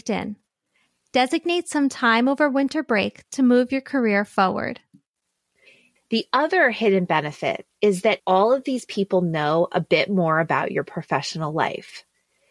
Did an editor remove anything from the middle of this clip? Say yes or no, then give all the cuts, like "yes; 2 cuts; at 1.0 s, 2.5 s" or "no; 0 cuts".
yes; 2 cuts; at 6.0 s, 8.2 s